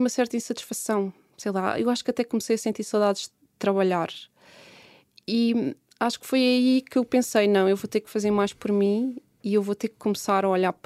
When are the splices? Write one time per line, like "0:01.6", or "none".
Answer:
none